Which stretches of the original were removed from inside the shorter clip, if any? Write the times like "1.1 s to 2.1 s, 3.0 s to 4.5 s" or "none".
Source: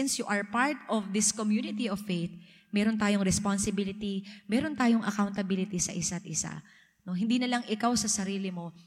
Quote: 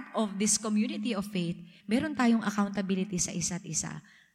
2.5 s to 4.4 s